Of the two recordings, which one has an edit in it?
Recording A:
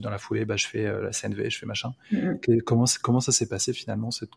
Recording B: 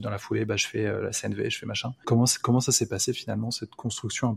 B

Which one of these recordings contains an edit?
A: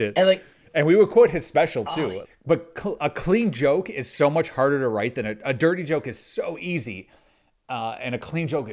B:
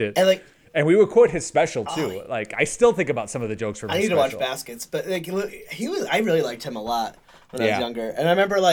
A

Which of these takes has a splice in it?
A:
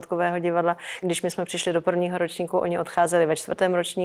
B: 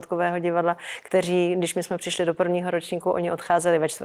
A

